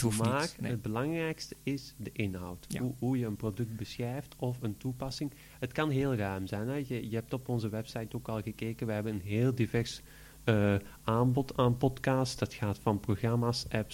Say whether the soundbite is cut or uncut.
uncut